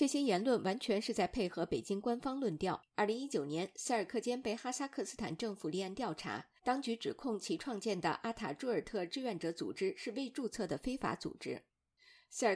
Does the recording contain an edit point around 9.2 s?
no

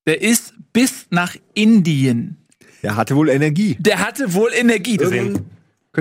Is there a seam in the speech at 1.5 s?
no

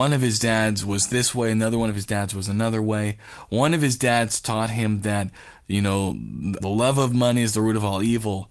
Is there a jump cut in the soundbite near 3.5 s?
no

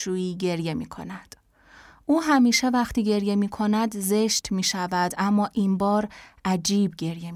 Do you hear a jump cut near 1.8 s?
no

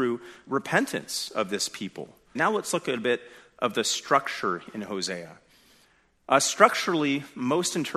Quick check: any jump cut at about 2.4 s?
yes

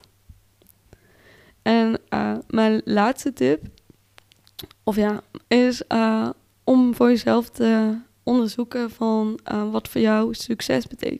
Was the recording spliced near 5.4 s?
yes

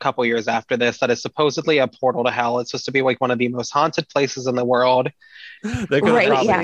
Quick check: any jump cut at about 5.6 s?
yes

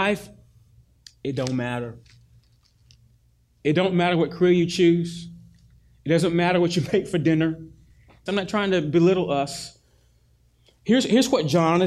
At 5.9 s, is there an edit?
no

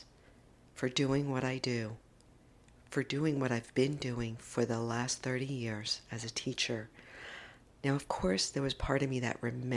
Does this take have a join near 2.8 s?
no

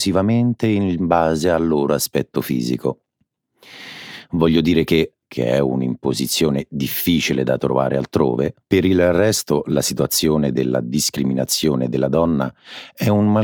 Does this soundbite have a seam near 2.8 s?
no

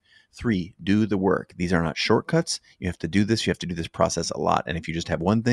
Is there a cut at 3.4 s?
no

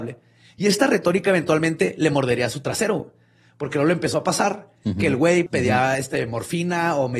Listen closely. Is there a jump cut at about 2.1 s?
no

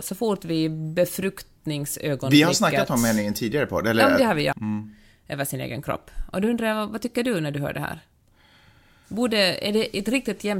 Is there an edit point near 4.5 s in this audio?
yes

